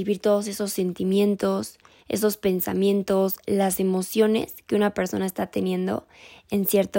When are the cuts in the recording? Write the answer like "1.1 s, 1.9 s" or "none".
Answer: none

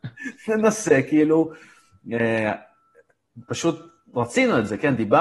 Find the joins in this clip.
none

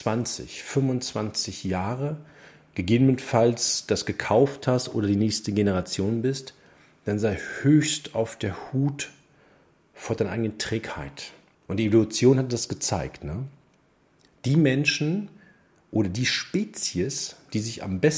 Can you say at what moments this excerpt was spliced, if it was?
11.5 s

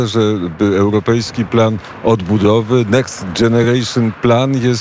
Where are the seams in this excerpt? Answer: none

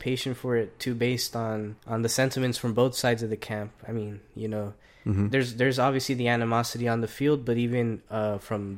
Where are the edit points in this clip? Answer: 1.8 s

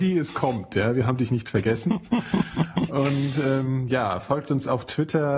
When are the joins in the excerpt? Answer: none

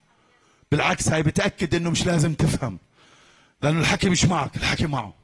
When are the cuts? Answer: none

